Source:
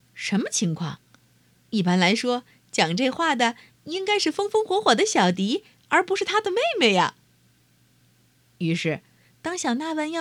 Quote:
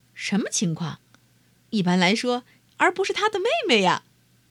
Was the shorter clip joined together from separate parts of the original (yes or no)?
yes